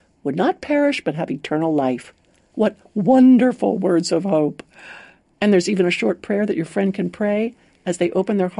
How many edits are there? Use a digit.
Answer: 0